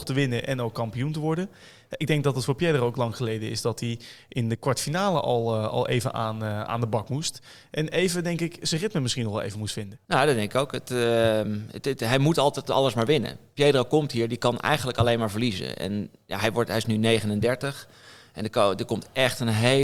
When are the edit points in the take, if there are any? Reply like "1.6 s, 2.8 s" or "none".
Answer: none